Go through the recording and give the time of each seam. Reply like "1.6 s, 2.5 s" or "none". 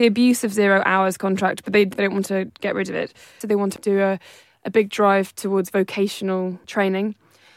3.4 s